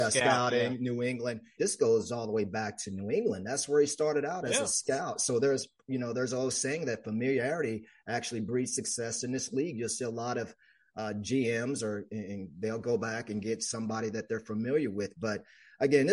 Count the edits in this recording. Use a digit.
1